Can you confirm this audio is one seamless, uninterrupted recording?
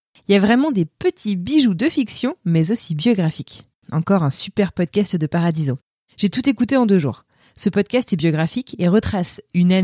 no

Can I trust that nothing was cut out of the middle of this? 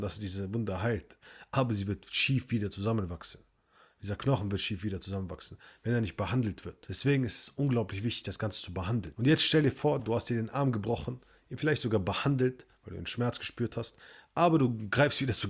yes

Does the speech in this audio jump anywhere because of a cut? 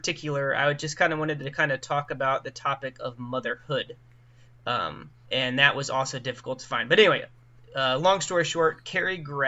yes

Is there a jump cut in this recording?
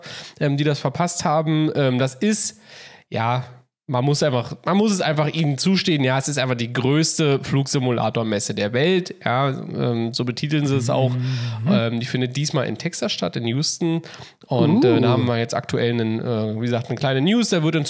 no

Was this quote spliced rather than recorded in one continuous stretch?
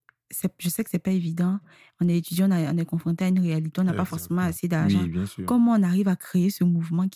no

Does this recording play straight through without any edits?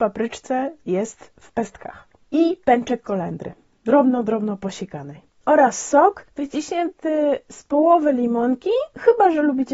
yes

